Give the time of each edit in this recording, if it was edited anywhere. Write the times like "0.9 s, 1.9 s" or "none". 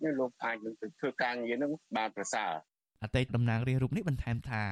3.3 s

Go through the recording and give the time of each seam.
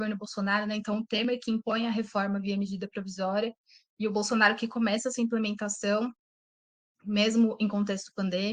none

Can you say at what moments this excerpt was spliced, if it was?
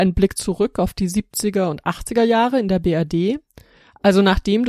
none

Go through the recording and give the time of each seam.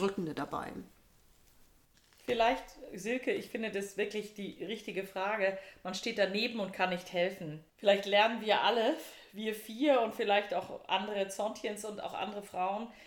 7.7 s

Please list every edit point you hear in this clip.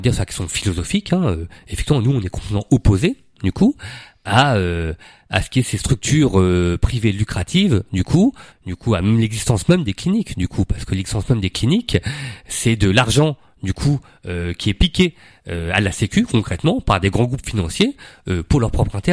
8.5 s

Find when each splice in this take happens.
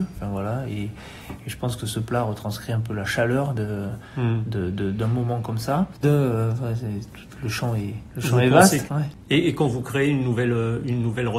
6.0 s, 8.9 s

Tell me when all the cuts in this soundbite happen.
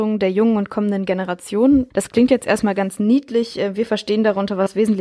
1.9 s

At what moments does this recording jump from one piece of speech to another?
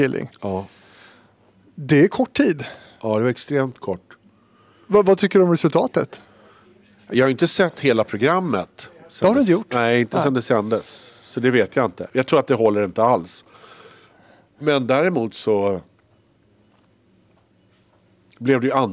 none

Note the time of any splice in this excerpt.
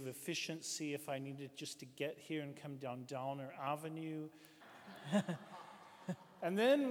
4.6 s

